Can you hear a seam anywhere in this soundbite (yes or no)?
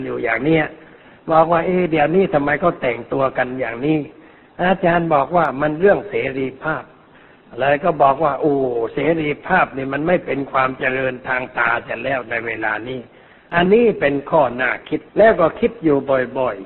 yes